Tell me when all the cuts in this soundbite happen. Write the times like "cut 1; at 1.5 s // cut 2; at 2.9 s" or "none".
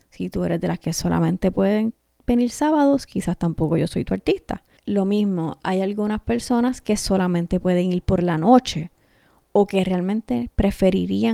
cut 1; at 4.8 s